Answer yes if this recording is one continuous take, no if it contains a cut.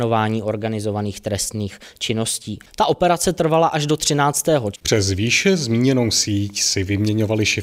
no